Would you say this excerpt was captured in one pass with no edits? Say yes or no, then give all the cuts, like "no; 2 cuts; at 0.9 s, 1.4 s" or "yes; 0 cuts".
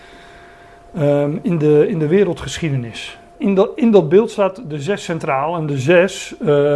no; 1 cut; at 3.3 s